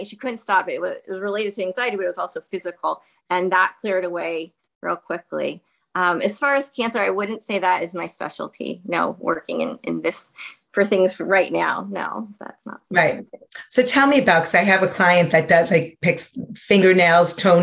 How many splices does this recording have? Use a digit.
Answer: 0